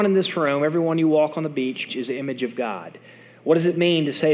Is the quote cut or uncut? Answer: cut